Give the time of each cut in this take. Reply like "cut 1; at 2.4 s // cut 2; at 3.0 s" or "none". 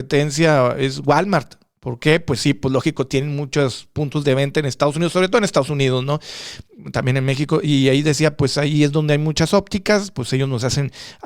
none